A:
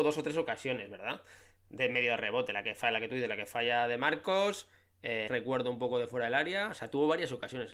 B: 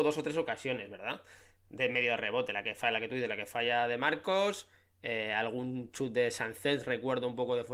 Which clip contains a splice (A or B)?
A